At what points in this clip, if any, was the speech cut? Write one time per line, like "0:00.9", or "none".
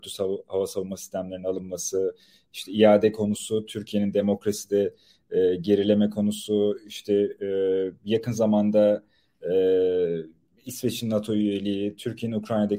none